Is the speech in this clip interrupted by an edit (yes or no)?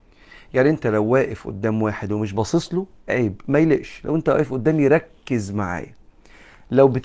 no